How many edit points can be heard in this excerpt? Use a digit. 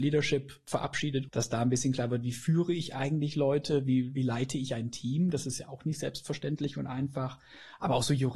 1